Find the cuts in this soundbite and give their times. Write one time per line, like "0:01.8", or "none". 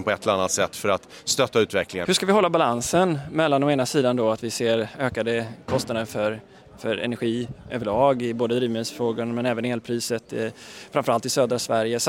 0:02.0